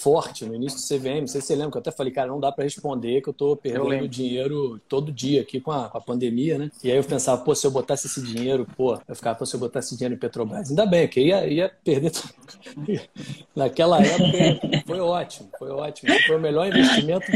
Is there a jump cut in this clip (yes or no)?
no